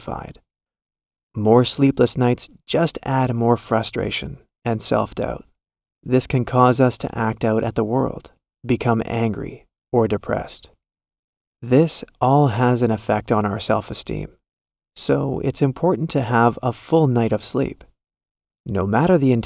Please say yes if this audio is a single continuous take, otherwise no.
no